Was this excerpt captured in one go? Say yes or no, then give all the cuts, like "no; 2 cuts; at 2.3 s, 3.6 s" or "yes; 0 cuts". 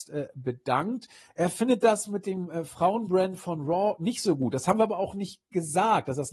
yes; 0 cuts